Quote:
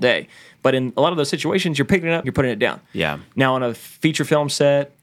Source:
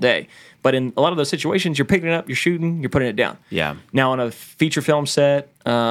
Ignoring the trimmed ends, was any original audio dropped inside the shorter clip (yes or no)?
yes